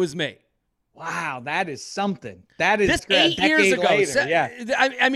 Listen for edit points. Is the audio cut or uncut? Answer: cut